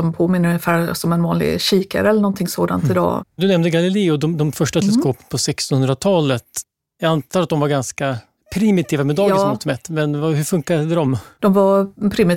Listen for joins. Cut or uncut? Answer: cut